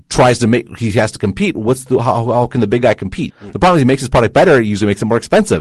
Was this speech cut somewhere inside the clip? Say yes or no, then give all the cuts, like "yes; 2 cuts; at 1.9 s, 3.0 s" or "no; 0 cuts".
yes; 1 cut; at 3.3 s